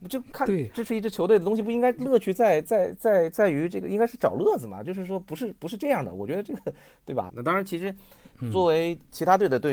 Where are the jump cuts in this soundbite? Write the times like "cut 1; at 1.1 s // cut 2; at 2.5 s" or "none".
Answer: cut 1; at 7.3 s

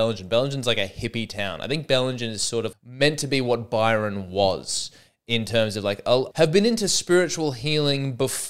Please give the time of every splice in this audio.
cut 1; at 2.7 s // cut 2; at 6.3 s

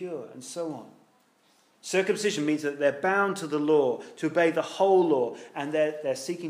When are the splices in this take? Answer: cut 1; at 1.7 s

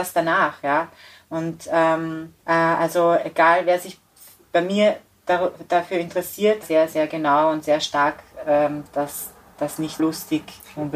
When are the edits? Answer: cut 1; at 2.4 s // cut 2; at 6.6 s // cut 3; at 10.0 s

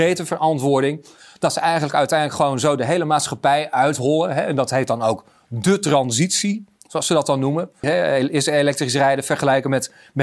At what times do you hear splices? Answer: cut 1; at 7.8 s

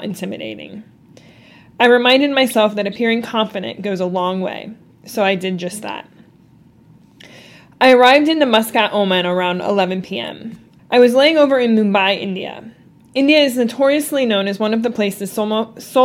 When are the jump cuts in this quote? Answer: cut 1; at 10.8 s

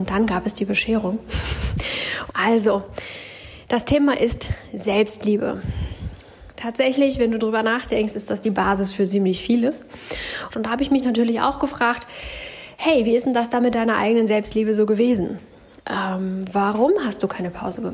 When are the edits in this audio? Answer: cut 1; at 2.3 s // cut 2; at 10.5 s

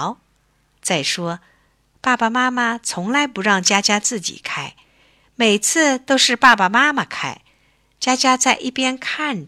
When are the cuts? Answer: none

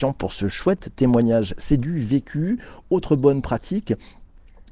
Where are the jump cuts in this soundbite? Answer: none

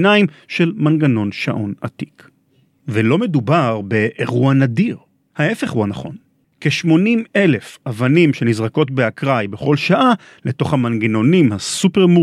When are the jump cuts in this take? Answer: cut 1; at 6.4 s

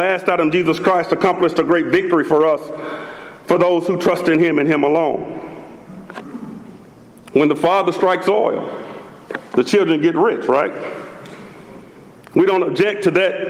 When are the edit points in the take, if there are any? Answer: none

